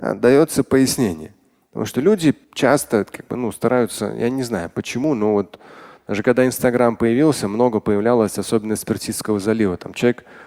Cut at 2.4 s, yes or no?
yes